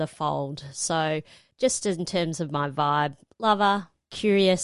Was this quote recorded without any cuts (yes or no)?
yes